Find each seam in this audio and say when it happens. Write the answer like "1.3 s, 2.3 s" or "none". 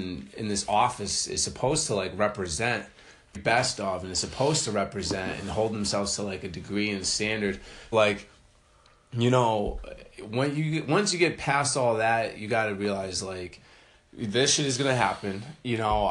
3.3 s, 7.9 s